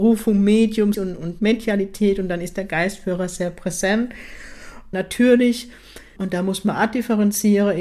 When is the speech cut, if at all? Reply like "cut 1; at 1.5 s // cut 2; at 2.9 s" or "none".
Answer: cut 1; at 0.9 s // cut 2; at 4.9 s // cut 3; at 6.2 s